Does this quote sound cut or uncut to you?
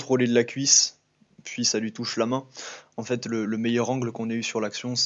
uncut